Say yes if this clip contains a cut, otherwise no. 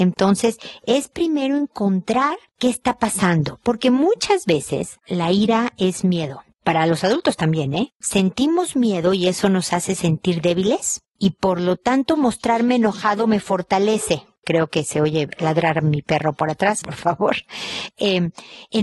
yes